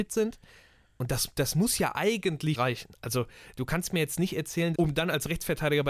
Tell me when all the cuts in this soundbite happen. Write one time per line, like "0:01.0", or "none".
0:02.5
0:04.7